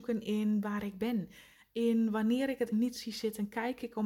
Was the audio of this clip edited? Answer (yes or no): yes